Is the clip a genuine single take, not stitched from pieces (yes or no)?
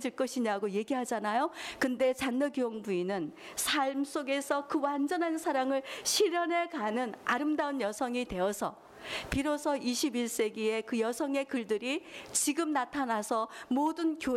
yes